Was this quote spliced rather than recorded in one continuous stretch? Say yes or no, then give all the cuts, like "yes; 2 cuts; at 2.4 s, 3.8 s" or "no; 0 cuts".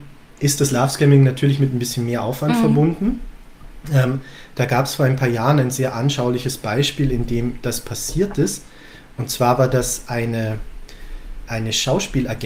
yes; 1 cut; at 11.5 s